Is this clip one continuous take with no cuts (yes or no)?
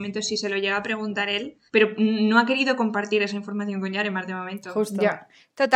no